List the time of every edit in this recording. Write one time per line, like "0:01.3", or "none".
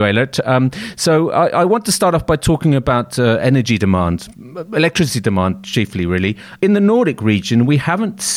none